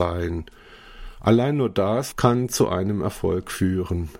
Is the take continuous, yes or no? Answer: no